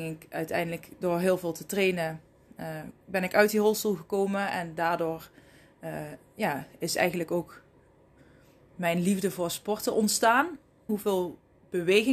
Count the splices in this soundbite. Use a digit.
1